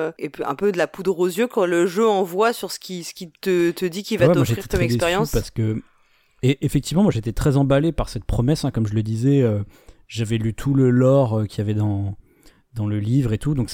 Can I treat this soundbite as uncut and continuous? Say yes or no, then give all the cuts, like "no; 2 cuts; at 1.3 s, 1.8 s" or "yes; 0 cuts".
yes; 0 cuts